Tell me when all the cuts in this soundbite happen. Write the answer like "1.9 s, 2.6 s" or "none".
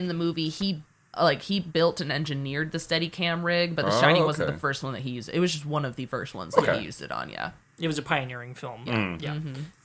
none